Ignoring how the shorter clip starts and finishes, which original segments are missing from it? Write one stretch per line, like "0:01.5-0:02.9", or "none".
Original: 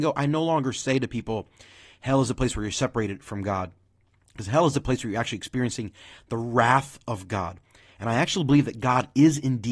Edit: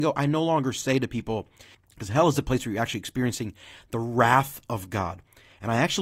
0:01.7-0:04.1